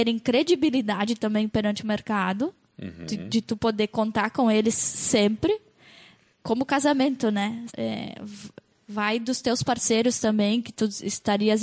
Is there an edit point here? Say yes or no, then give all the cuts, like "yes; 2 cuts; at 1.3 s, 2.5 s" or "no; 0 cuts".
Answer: yes; 1 cut; at 7.7 s